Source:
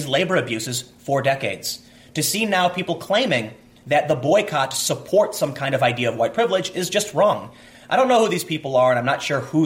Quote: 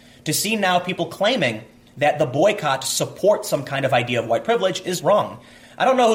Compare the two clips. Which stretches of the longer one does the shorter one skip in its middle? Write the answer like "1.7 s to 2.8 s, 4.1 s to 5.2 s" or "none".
6.9 s to 7.1 s